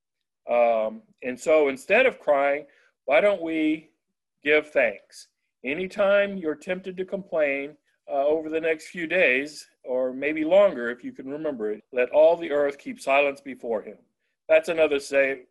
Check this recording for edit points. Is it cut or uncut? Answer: cut